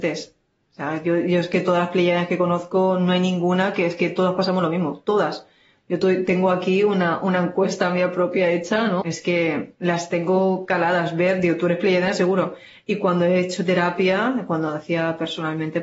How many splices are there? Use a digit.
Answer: 1